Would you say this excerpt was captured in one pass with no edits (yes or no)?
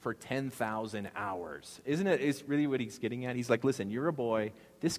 yes